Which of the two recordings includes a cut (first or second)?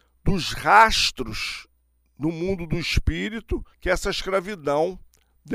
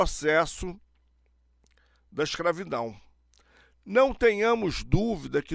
first